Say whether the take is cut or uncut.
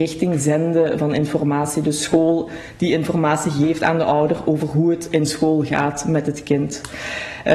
uncut